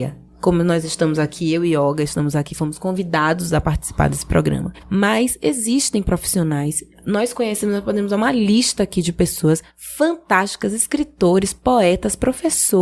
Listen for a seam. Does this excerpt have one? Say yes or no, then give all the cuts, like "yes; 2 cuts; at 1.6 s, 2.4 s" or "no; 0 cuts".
yes; 1 cut; at 4.8 s